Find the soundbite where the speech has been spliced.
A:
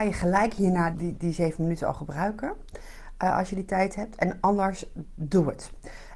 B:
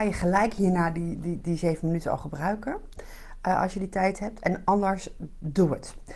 A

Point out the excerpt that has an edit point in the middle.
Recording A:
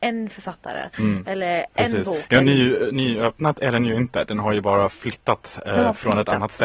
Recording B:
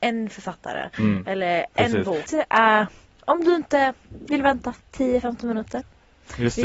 B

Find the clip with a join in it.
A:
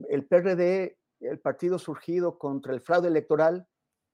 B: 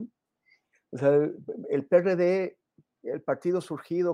A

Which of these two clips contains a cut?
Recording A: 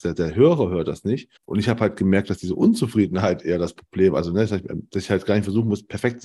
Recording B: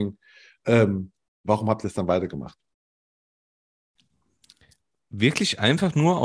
A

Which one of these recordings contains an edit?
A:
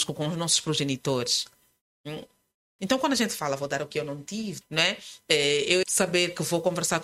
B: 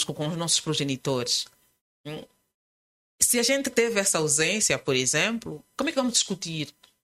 A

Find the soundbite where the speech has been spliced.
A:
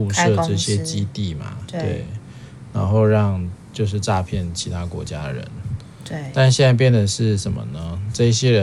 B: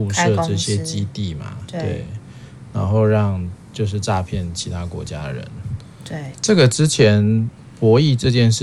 B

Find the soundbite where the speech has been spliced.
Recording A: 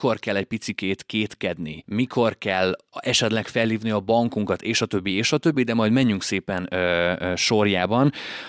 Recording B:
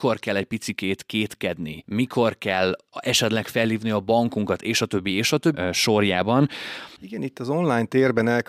B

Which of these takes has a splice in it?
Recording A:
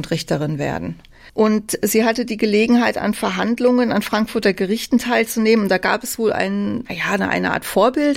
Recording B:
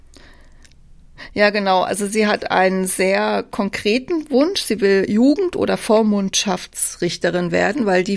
A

